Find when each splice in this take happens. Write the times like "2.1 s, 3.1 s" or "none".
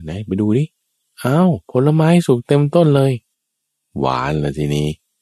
1.6 s